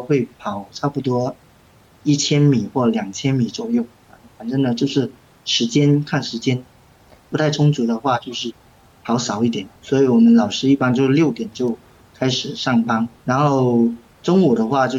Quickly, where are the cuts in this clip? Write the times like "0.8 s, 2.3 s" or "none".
7.2 s, 9.8 s, 13.2 s